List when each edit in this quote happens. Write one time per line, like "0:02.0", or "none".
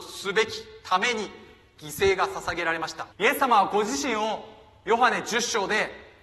0:03.1